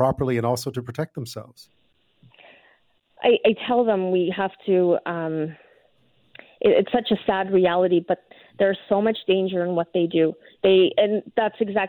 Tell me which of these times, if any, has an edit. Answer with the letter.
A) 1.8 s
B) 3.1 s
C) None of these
C